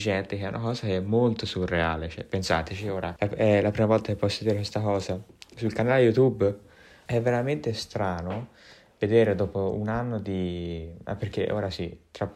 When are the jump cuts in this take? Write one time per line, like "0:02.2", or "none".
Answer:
0:03.2
0:07.1